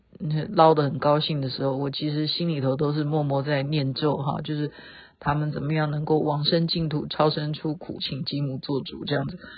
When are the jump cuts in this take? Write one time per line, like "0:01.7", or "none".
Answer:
0:08.0